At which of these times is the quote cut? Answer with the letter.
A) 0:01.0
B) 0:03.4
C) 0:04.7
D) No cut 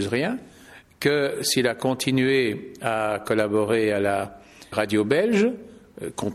C